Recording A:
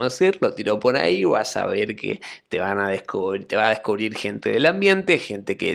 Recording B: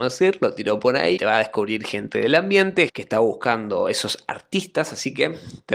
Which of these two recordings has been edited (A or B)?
B